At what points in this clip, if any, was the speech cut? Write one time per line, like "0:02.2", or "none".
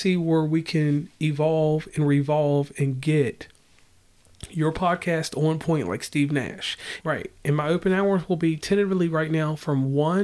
0:07.0